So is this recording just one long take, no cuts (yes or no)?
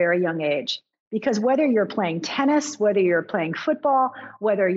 yes